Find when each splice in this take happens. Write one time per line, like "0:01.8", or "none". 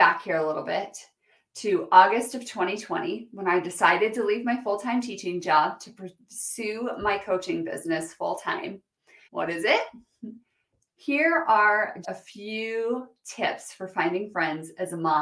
0:09.2
0:10.9
0:12.0